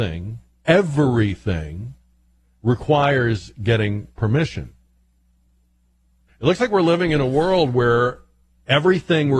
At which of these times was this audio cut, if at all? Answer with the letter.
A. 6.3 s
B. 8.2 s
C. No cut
A